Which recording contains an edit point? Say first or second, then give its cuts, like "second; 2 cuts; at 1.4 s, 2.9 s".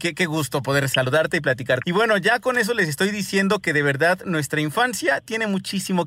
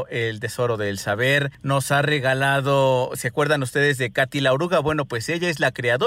first; 1 cut; at 1.8 s